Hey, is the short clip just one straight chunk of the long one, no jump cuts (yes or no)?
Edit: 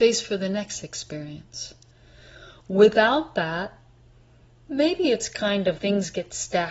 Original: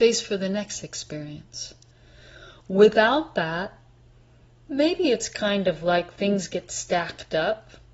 no